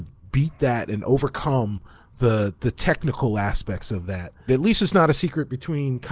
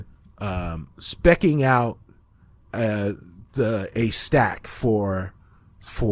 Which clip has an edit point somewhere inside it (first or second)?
first